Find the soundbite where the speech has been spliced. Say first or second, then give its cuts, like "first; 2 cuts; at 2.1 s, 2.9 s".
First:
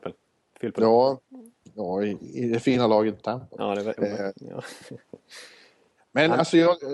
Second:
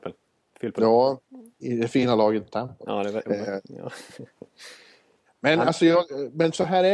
second; 1 cut; at 1.6 s